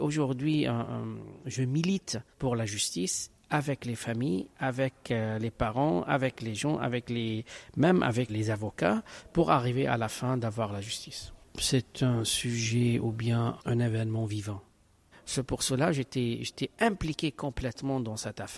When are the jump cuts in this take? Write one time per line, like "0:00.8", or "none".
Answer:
0:02.3
0:08.3
0:15.1